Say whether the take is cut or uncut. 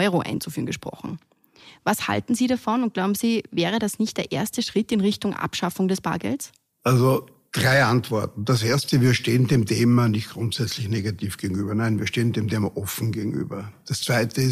uncut